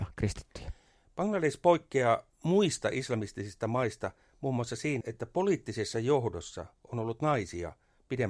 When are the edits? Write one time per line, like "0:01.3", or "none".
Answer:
0:05.0